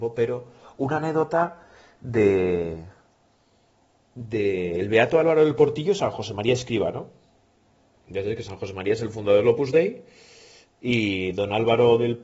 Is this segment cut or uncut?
uncut